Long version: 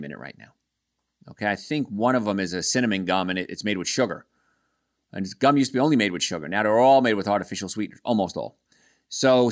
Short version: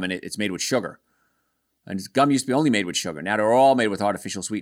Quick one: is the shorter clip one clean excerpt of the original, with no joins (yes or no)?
yes